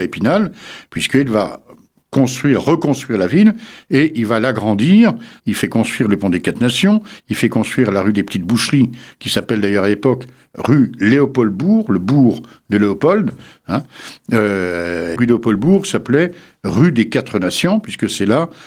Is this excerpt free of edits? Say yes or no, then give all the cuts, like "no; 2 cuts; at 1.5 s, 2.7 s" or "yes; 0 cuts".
no; 2 cuts; at 5.4 s, 15.1 s